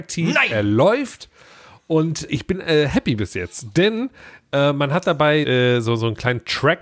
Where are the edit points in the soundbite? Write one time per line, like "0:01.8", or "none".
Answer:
0:02.3
0:05.4